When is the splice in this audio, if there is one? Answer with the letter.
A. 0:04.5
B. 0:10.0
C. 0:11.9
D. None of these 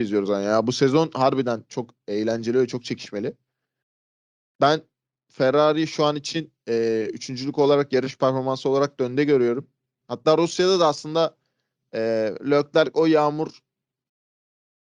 B